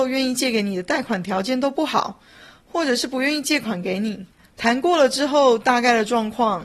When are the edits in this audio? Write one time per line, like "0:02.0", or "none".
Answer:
0:04.5